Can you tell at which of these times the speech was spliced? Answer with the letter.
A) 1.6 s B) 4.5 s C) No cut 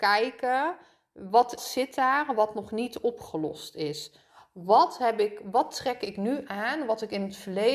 A